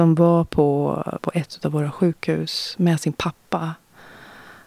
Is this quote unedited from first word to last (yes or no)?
no